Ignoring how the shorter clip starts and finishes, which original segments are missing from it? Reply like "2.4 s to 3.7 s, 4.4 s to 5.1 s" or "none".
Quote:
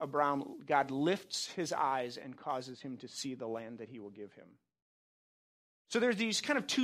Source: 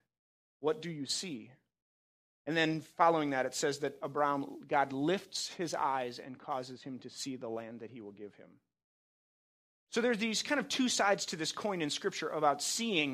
none

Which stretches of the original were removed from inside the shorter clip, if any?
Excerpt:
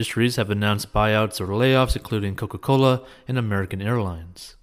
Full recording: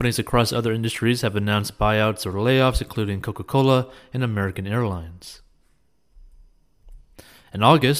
none

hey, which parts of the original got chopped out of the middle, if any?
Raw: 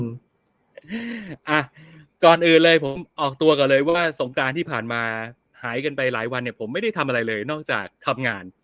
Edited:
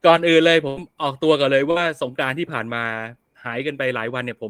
none

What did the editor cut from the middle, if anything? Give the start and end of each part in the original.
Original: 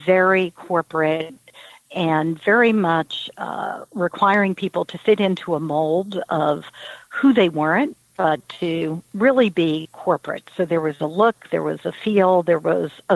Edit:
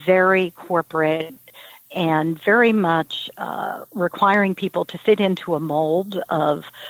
none

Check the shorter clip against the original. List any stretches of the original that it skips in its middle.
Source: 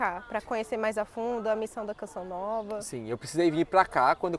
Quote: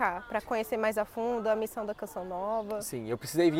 none

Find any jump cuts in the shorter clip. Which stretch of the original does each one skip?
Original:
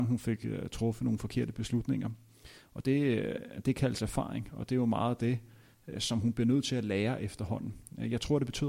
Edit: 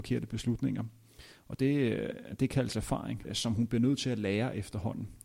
4.5 s to 5.9 s

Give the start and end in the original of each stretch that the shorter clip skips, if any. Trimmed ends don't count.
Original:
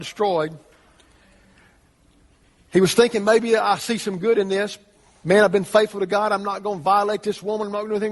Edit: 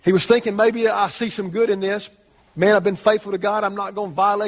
none

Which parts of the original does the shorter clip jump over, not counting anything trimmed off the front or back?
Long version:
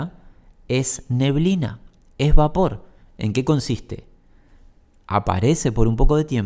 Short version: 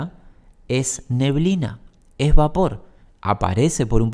3.1 s to 5.0 s

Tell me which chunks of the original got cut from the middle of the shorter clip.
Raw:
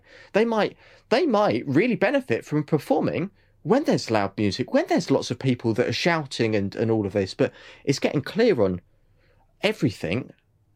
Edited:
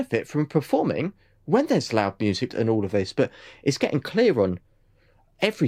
4.7 s to 6.7 s

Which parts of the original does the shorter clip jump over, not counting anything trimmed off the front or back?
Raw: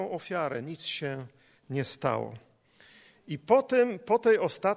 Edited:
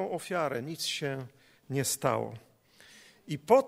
none

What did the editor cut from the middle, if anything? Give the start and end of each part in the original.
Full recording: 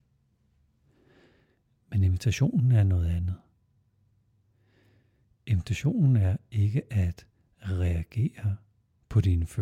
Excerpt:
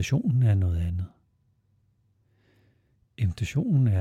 none

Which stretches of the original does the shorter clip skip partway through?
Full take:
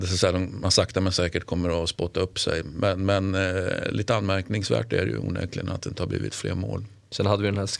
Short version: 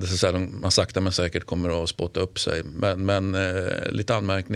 none

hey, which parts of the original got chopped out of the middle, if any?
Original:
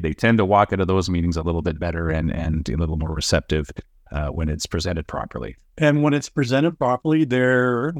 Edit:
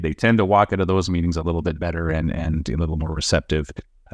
none

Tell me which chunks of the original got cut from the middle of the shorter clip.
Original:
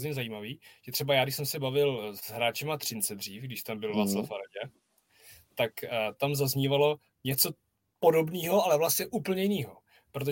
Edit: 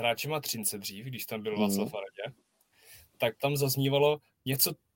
5.7 s to 6.2 s

